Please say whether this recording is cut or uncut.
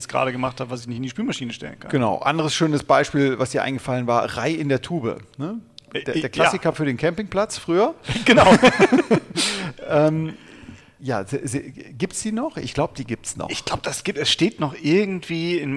uncut